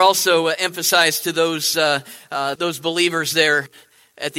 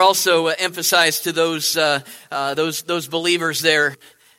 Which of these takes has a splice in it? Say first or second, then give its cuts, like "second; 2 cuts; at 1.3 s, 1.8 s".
first; 1 cut; at 2.6 s